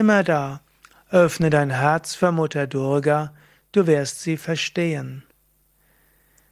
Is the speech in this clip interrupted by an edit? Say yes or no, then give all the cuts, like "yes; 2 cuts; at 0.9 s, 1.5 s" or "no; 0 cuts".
no; 0 cuts